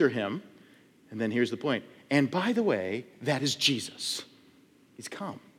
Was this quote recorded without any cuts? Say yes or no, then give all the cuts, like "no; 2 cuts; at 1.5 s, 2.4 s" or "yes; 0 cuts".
yes; 0 cuts